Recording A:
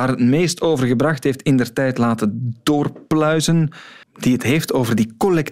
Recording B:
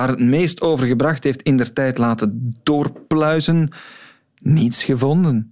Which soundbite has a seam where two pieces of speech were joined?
A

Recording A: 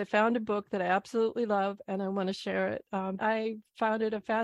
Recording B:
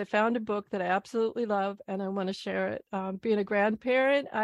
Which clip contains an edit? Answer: A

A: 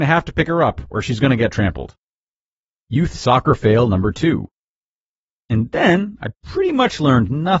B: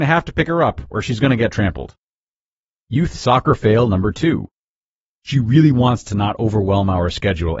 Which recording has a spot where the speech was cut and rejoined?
B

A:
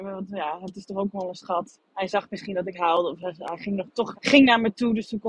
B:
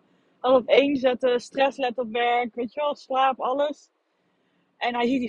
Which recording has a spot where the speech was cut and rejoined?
A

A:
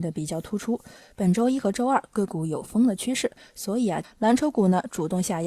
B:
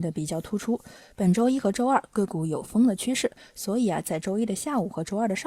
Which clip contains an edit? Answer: A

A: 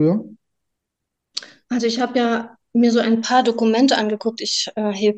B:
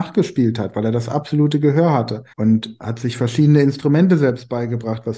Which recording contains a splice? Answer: B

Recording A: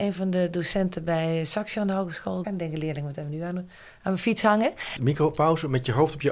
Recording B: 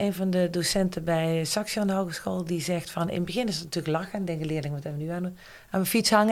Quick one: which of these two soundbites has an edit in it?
A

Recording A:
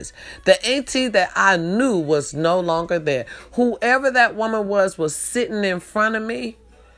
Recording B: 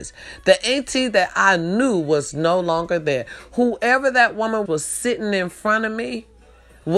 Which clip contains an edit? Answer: B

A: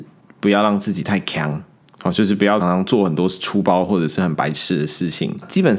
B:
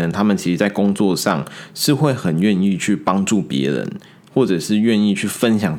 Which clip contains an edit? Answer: A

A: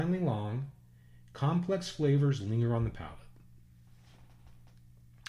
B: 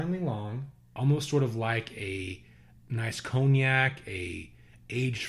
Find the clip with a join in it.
B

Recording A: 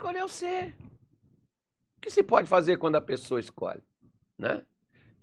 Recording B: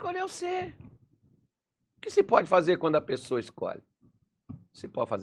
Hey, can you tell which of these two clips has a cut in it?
A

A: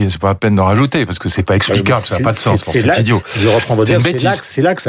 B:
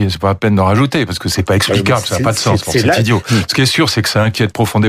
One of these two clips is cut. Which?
B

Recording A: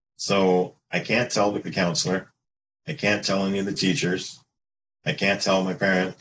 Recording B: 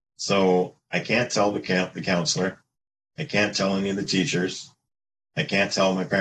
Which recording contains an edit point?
A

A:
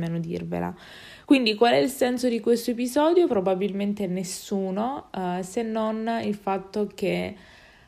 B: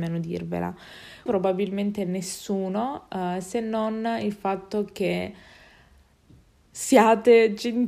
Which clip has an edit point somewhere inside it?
B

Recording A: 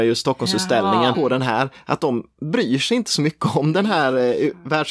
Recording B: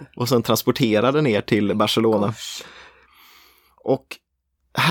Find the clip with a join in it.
A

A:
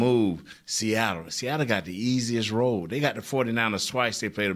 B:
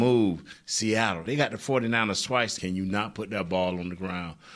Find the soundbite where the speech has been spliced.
B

